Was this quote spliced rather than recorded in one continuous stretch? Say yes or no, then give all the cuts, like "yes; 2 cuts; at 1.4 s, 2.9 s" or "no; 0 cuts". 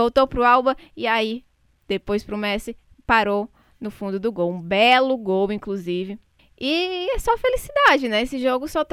yes; 1 cut; at 6.4 s